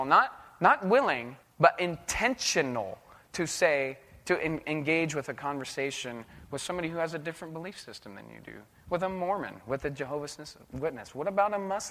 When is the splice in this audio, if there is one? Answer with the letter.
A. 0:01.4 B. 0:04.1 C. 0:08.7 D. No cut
A